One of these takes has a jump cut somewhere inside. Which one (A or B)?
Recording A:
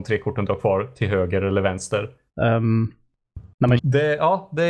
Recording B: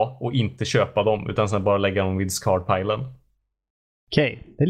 A